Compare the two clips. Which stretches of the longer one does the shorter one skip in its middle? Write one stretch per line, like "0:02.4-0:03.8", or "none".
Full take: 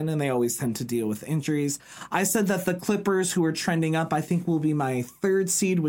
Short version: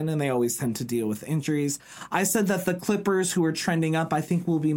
none